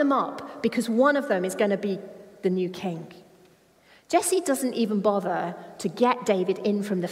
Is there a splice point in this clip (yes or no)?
no